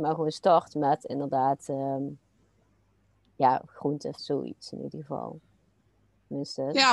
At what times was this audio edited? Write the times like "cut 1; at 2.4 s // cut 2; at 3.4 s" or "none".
cut 1; at 4.2 s